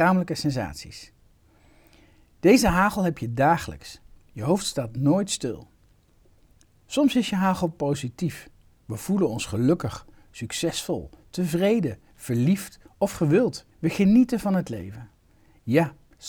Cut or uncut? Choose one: cut